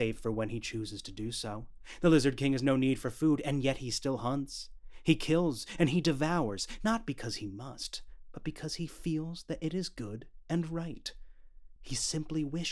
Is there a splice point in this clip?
yes; 1 cut; at 11.8 s

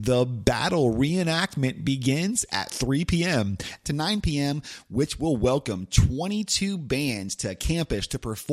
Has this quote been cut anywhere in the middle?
yes; 1 cut; at 3.8 s

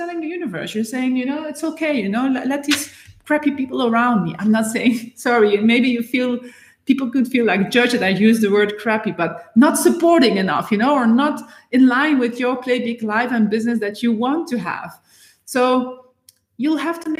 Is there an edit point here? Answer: no; 0 cuts

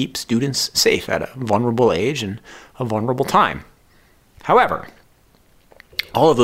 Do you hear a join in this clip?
no; 0 cuts

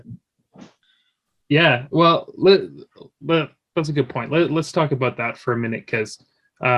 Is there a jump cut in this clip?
no; 0 cuts

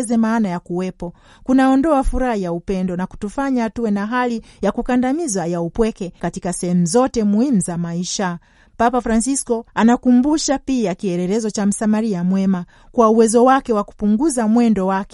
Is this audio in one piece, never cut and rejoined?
yes; 0 cuts

